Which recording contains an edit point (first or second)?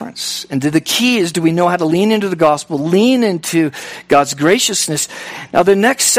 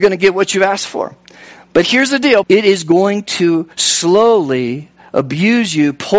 second